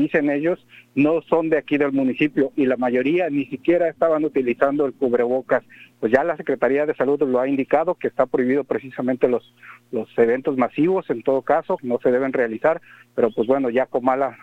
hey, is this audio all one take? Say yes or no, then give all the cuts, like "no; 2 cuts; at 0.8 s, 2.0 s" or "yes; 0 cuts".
no; 2 cuts; at 5.9 s, 11.8 s